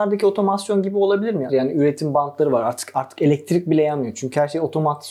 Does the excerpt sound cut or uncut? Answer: cut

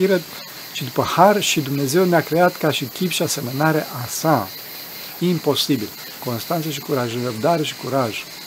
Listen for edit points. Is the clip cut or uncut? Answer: cut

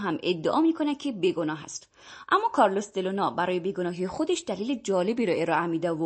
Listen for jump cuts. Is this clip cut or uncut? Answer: cut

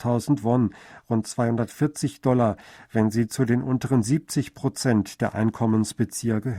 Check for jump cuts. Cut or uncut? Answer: uncut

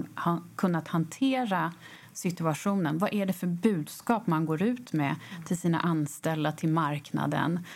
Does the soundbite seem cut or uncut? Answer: uncut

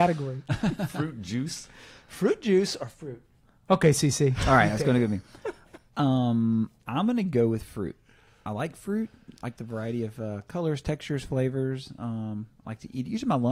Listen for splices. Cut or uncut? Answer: uncut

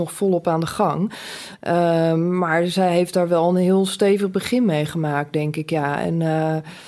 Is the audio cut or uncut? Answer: uncut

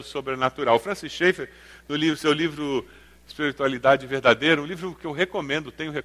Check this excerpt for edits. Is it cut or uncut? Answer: uncut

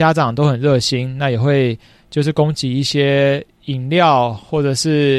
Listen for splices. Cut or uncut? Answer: uncut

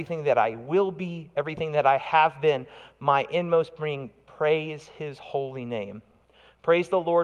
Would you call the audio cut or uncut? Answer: uncut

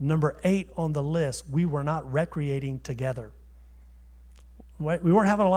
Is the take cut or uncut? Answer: uncut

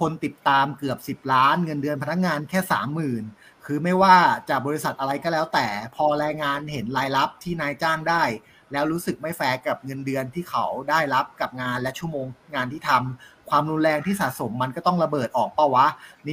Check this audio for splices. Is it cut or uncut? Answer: uncut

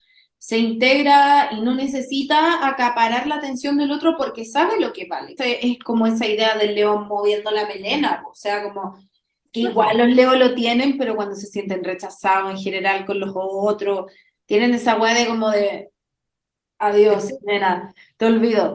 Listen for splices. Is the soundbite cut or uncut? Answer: cut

